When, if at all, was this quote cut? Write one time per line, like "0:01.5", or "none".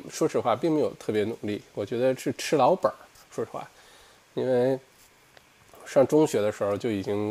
none